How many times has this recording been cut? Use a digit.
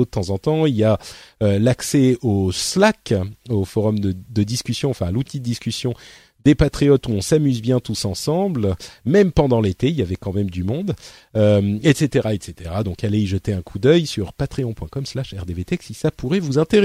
0